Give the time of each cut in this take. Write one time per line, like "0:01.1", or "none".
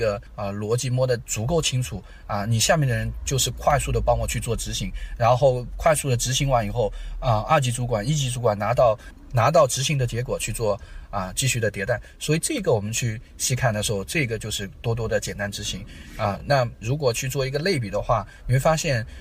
none